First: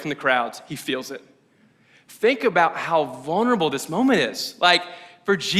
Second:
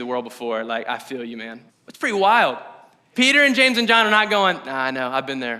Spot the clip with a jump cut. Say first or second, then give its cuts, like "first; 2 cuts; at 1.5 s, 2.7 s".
second; 2 cuts; at 1.7 s, 3.1 s